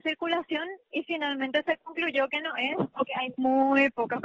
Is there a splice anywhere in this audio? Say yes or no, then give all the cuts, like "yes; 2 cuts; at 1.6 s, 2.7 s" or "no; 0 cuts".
no; 0 cuts